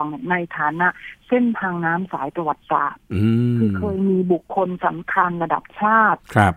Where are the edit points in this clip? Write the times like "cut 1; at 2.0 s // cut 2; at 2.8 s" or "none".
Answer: none